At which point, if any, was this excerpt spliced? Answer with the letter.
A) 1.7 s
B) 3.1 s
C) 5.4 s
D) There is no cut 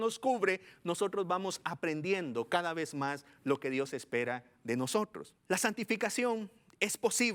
C